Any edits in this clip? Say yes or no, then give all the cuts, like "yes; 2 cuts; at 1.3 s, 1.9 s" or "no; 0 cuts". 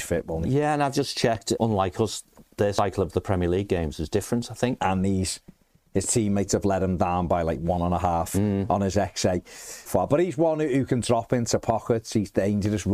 yes; 3 cuts; at 1.6 s, 4.8 s, 9.9 s